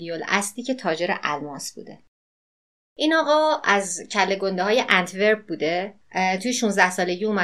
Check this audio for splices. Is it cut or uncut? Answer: cut